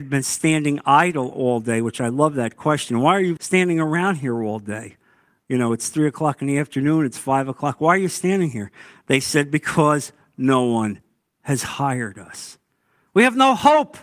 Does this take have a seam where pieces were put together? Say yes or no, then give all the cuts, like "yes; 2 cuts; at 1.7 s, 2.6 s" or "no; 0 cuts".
yes; 1 cut; at 3.4 s